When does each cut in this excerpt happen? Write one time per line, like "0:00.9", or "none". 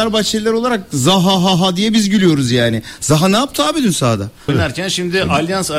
0:04.5